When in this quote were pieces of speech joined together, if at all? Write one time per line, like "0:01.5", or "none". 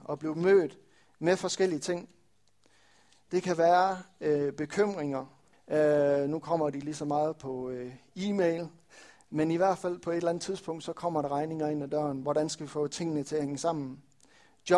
0:05.5